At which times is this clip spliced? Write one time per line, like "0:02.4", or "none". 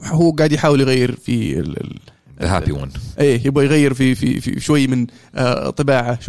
0:04.6